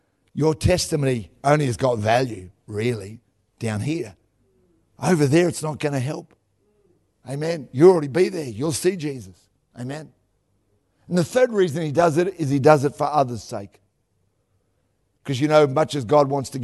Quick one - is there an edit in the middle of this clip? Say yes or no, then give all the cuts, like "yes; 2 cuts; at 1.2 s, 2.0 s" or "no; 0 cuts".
yes; 1 cut; at 9.7 s